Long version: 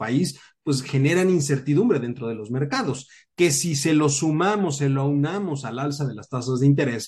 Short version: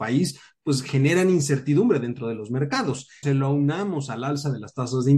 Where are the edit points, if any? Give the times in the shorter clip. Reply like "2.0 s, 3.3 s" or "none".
3.2 s